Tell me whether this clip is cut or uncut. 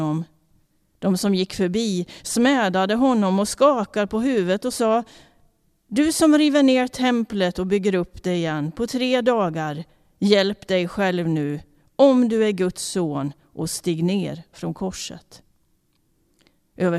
uncut